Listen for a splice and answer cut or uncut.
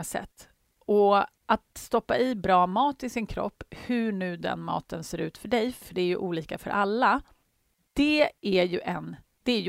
uncut